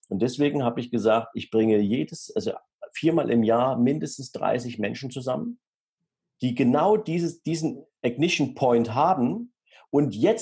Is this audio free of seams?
yes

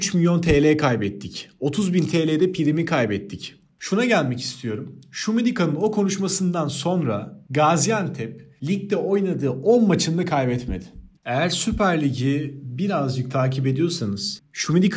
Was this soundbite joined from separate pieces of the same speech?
yes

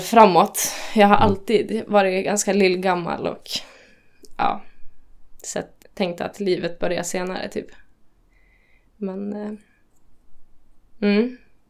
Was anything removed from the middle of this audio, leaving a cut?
yes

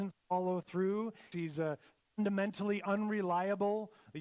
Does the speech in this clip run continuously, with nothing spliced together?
no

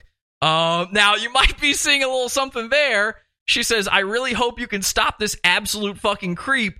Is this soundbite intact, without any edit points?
yes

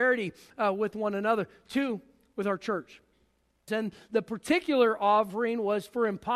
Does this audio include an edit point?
yes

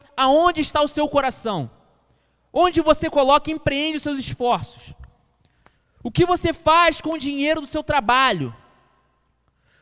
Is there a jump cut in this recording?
no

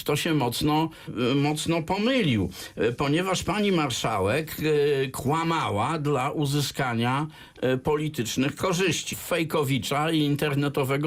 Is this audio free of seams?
no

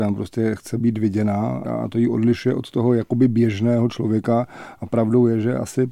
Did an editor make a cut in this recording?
yes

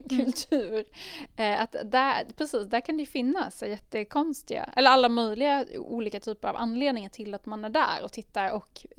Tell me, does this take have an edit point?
no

